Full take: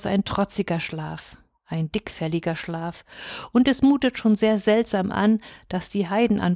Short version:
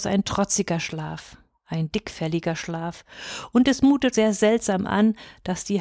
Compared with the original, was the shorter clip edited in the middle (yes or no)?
yes